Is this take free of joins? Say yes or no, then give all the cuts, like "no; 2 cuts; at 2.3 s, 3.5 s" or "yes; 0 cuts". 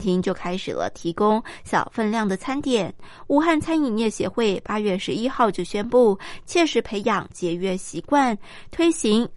no; 1 cut; at 6.4 s